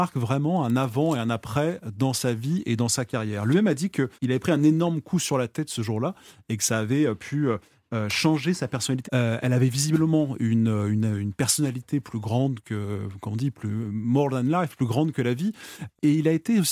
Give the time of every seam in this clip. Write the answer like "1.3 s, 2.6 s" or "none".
4.1 s, 9.0 s

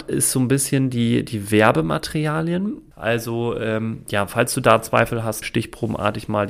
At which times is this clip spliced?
2.9 s, 5.4 s

